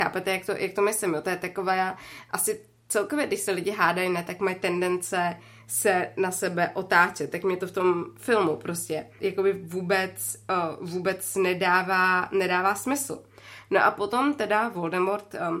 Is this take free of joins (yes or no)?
no